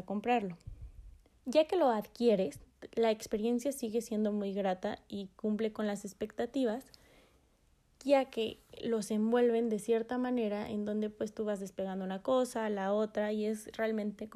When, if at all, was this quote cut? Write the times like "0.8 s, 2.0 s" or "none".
1.3 s